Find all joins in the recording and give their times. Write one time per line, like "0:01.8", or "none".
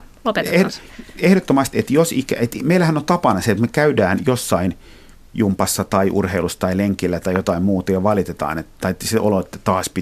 0:01.7